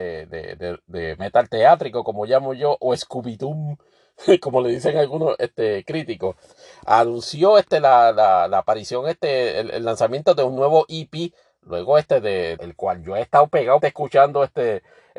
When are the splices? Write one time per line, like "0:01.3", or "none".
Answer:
0:12.6
0:13.8